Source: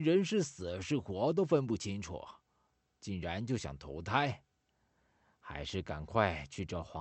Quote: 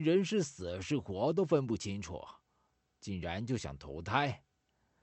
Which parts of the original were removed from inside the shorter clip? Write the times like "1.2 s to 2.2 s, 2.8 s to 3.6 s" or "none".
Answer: none